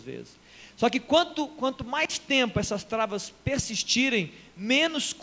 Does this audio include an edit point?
no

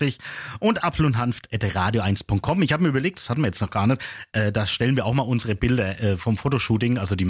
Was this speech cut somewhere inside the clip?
yes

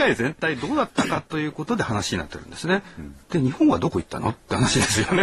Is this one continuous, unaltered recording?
no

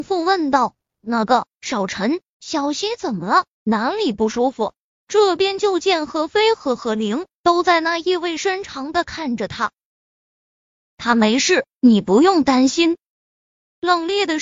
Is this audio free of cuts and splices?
no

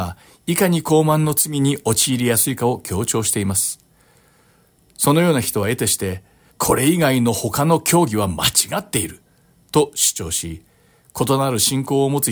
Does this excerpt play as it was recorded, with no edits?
no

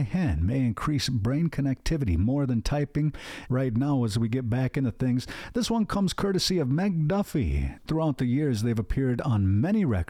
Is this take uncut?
no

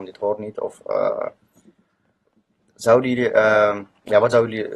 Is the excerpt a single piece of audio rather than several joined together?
yes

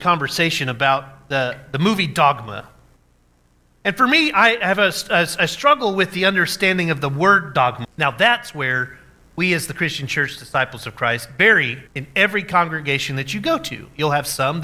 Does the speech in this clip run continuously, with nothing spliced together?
no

